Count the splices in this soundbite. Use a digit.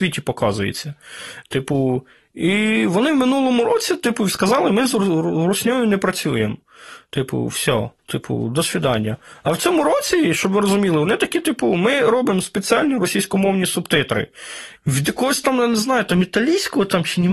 2